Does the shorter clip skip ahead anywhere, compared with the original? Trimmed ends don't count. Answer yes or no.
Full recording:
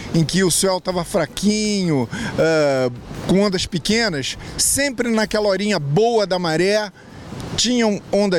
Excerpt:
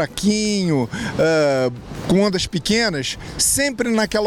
no